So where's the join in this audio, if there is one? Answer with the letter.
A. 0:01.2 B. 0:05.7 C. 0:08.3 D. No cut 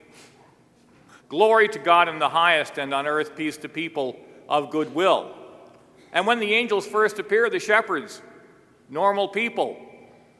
A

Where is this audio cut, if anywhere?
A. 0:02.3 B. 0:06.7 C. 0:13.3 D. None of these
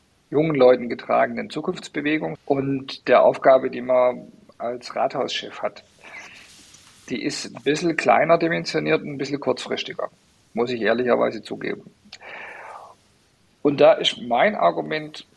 A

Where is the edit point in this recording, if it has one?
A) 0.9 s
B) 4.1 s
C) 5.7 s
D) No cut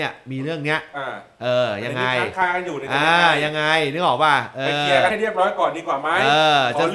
D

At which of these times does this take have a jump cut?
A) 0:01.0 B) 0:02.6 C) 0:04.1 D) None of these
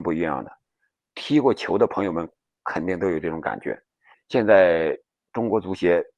C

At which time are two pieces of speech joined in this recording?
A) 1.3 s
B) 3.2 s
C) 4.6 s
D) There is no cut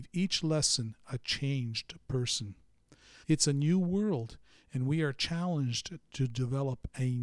B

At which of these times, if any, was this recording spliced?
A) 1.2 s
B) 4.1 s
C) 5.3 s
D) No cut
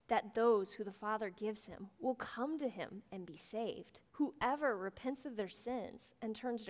B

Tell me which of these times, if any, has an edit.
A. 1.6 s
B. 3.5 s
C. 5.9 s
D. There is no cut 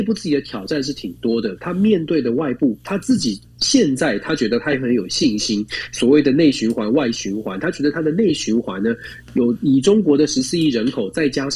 D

